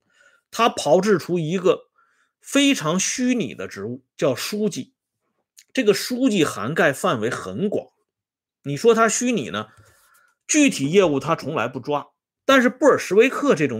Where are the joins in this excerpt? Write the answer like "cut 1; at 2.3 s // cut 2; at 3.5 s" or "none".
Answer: cut 1; at 8.5 s // cut 2; at 12.4 s